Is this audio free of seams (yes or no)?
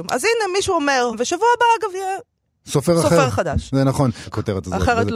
no